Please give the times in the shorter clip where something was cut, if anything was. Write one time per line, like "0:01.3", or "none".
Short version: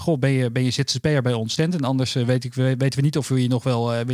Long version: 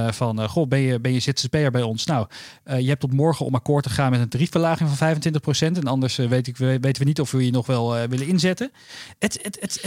0:01.6